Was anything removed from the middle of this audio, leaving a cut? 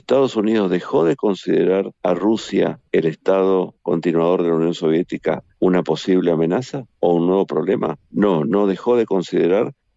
no; 0 cuts

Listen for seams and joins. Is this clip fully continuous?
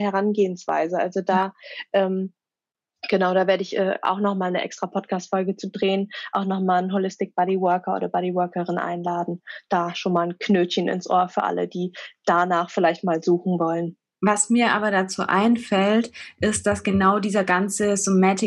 yes; 0 cuts

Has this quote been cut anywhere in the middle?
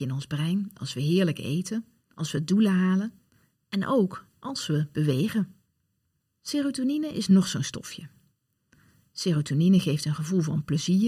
yes; 1 cut; at 2.1 s

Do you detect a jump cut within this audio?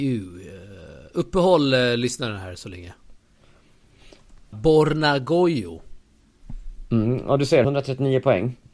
yes; 2 cuts; at 4.5 s, 7.6 s

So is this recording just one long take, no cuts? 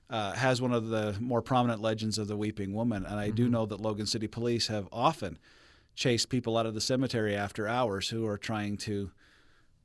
yes; 0 cuts

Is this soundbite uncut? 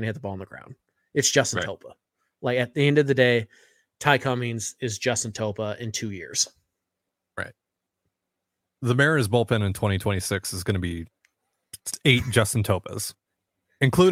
yes; 0 cuts

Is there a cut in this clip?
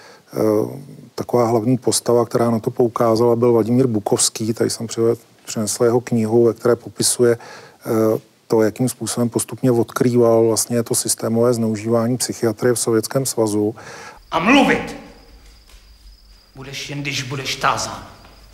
yes; 1 cut; at 14.2 s

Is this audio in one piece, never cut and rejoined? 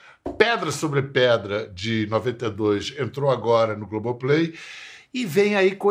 yes; 0 cuts

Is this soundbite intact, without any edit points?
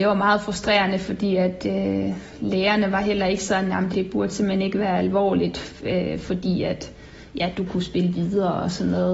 no; 1 cut; at 3.9 s

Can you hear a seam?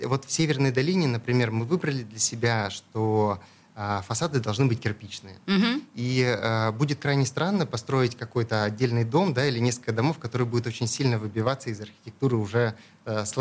no; 0 cuts

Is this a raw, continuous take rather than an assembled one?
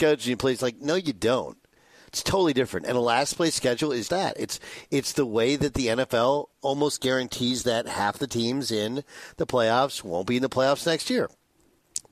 no; 2 cuts; at 4.1 s, 6.5 s

